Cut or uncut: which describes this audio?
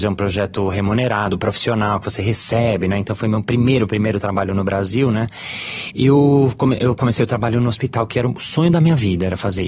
uncut